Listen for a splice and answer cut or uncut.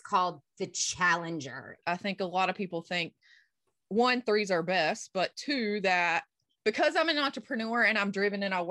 cut